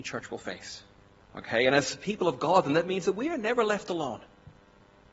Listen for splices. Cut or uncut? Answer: cut